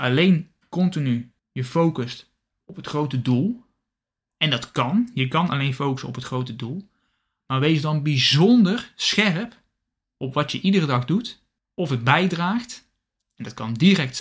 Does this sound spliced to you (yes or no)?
no